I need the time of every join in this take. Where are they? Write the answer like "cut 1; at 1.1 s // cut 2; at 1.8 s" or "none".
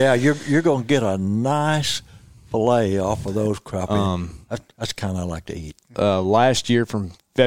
cut 1; at 5.9 s

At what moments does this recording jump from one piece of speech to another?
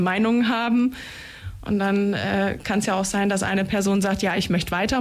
none

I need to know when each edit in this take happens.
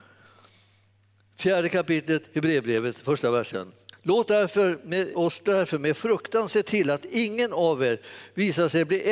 cut 1; at 5.1 s

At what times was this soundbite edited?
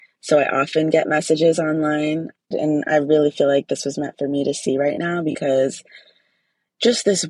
cut 1; at 2.5 s

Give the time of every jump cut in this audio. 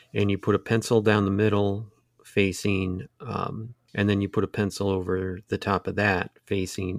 cut 1; at 3.9 s

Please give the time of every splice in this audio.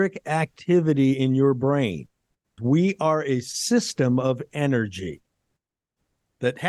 cut 1; at 2.6 s

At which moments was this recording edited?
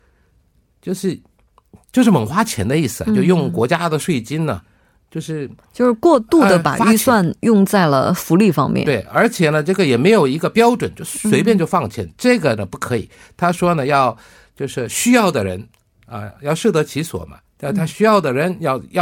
none

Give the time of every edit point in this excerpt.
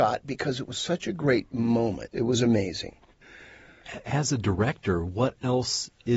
cut 1; at 2.1 s

